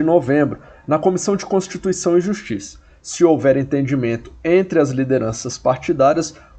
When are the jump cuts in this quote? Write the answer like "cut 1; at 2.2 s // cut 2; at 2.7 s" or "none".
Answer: none